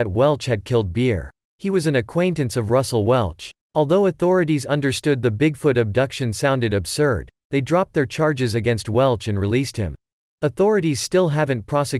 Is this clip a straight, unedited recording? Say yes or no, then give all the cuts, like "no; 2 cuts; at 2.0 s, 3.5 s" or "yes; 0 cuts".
no; 3 cuts; at 1.4 s, 3.6 s, 10.2 s